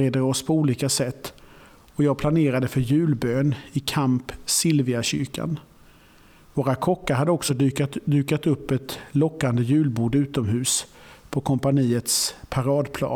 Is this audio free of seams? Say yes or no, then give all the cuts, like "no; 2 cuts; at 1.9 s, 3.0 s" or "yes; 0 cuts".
yes; 0 cuts